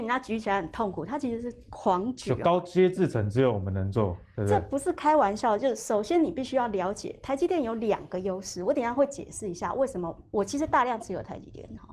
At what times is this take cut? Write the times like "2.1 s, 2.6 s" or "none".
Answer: none